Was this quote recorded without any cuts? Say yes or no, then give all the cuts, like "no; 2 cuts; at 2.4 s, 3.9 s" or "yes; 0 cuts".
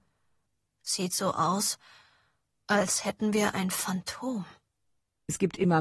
yes; 0 cuts